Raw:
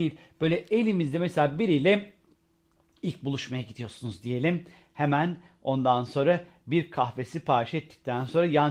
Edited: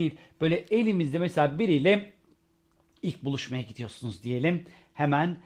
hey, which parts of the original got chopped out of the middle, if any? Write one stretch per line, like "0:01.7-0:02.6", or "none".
none